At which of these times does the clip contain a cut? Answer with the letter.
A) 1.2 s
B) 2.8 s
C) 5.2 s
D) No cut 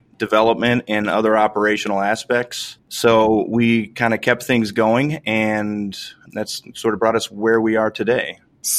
B